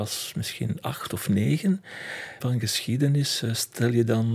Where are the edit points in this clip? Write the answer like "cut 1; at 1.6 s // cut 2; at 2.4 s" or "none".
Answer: cut 1; at 2.4 s